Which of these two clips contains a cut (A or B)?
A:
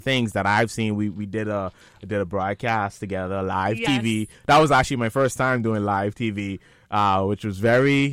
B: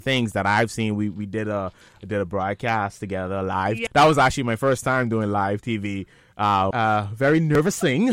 B